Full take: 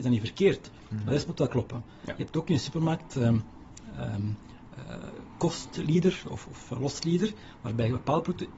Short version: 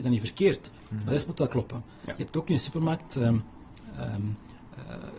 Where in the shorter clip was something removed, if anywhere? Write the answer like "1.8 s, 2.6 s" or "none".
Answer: none